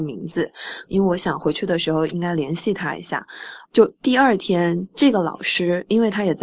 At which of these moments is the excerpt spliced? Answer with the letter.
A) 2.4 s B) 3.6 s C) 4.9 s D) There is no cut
B